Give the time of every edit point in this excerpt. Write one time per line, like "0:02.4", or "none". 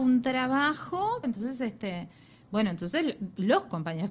0:01.2